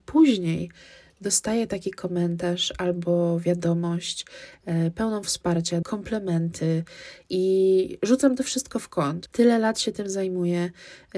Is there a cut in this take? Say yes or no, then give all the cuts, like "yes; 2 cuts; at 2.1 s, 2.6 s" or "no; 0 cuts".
yes; 2 cuts; at 5.8 s, 9.3 s